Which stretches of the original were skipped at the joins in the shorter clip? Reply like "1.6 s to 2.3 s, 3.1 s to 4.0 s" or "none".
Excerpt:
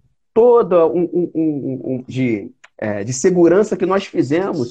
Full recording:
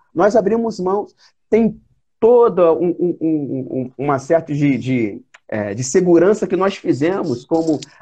3.9 s to 4.8 s